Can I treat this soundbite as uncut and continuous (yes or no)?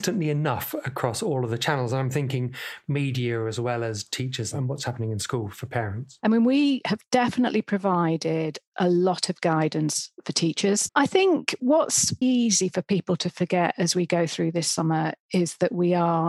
no